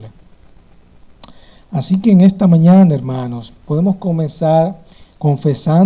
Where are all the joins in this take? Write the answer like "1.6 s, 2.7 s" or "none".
none